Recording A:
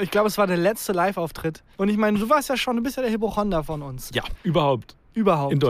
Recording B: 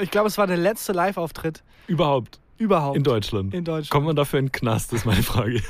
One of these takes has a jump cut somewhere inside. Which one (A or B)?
A